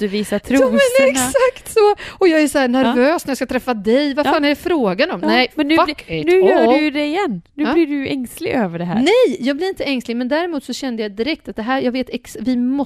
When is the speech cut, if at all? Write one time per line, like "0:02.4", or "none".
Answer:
none